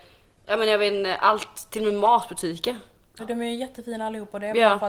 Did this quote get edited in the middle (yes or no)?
yes